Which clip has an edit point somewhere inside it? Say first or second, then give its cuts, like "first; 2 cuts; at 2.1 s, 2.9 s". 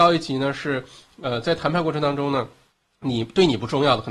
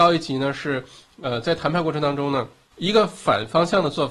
second; 1 cut; at 2.7 s